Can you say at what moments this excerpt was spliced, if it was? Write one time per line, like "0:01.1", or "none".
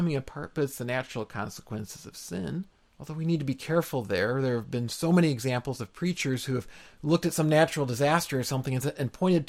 0:02.9